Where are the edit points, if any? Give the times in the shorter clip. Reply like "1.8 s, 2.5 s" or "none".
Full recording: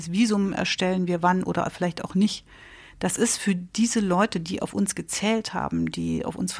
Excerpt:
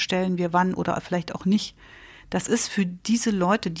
none